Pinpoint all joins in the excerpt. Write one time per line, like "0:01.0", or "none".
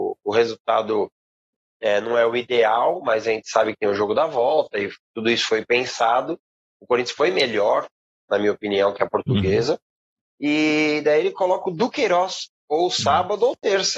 0:10.2
0:12.6